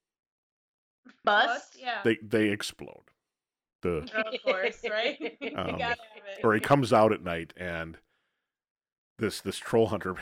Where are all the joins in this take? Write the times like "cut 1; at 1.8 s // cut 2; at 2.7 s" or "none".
cut 1; at 1.2 s // cut 2; at 3.7 s